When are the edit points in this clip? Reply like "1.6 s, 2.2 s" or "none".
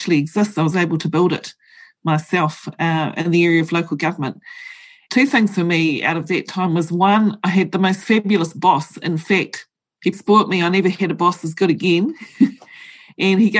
10.1 s